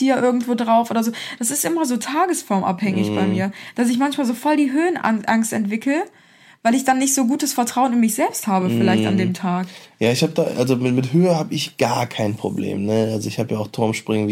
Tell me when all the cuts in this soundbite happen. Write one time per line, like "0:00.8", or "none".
none